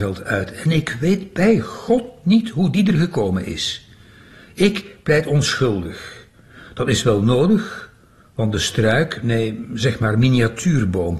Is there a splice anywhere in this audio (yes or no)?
no